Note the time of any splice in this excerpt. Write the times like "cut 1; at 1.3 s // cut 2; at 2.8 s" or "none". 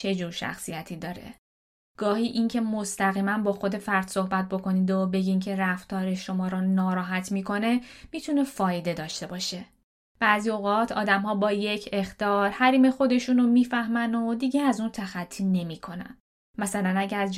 none